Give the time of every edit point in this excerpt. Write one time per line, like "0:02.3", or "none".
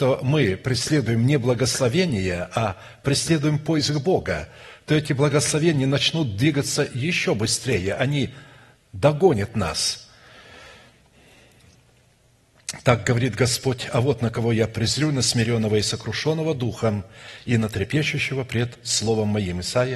none